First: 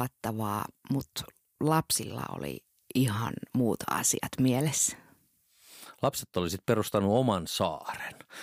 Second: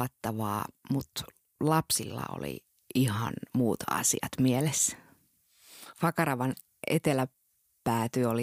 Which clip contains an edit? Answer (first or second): second